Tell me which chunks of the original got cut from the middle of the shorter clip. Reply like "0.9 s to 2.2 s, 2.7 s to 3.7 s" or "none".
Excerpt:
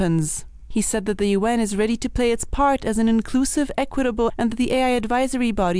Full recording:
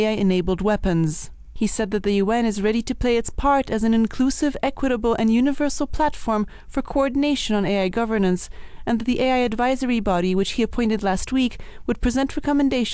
5.2 s to 8.8 s